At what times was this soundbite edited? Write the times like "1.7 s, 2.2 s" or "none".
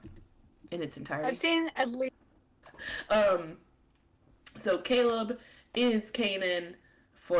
2.6 s

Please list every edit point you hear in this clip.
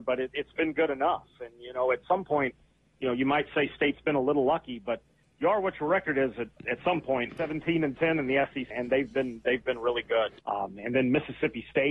7.3 s, 8.7 s, 10.4 s

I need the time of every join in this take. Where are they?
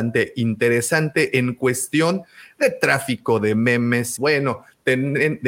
4.2 s

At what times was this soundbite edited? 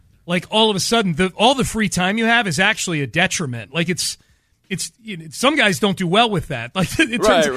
none

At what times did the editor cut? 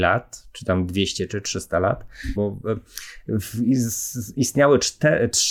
2.4 s

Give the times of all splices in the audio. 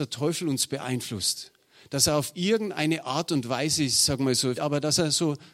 4.5 s

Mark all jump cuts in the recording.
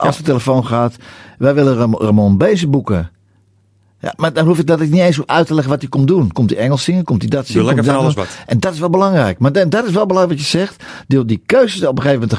6.3 s

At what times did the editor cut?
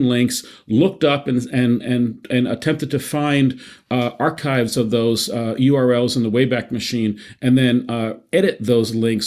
none

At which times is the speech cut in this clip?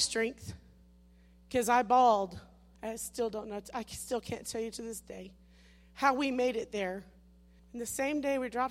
2.7 s, 7.6 s

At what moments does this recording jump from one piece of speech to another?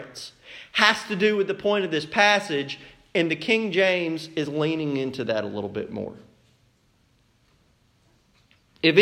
none

